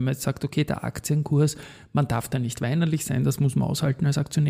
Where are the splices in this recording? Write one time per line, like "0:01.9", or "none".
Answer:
none